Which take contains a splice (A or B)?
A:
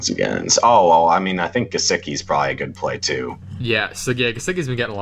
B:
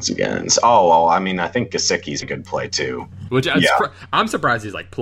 B